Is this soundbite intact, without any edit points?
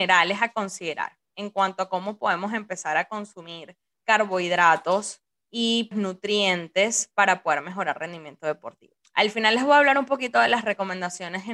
no; 1 cut; at 5.9 s

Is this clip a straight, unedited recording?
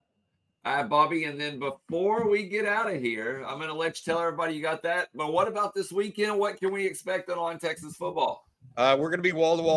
yes; 0 cuts

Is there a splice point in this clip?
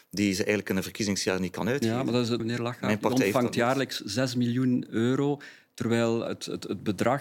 yes; 2 cuts; at 2.4 s, 6.3 s

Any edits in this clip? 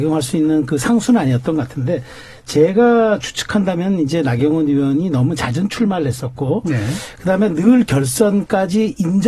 no; 0 cuts

